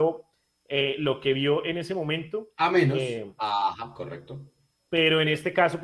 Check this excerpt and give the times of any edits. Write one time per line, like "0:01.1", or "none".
0:03.4